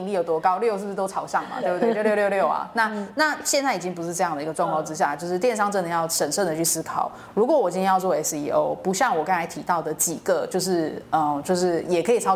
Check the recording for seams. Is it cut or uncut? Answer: uncut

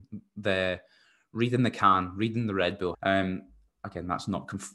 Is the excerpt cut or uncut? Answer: cut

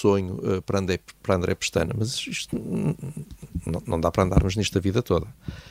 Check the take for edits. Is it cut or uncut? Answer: uncut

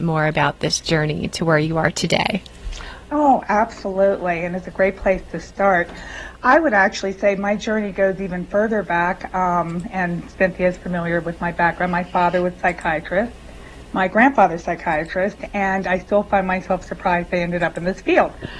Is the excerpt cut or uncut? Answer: uncut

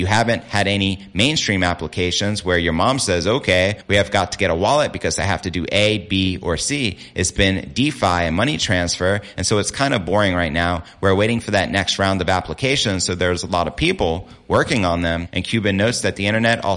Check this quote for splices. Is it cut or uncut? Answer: uncut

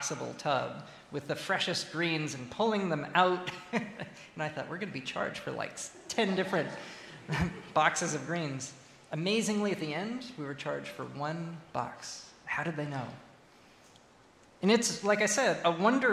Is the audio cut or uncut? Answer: uncut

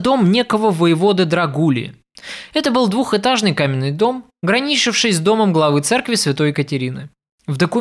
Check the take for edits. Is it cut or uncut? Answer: uncut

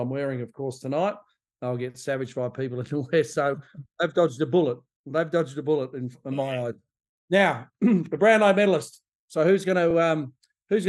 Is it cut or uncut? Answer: uncut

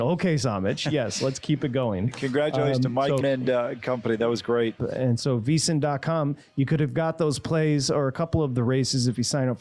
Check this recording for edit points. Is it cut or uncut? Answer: cut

